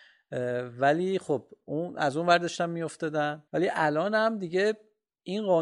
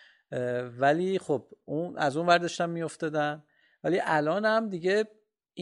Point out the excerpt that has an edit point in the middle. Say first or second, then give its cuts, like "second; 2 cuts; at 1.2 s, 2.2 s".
first; 1 cut; at 3.5 s